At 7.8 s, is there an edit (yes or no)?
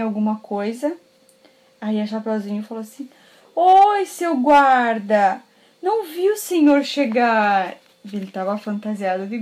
no